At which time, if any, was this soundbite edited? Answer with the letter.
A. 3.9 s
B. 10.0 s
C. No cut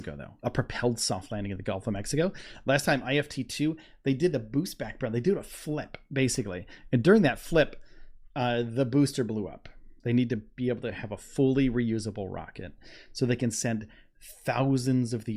B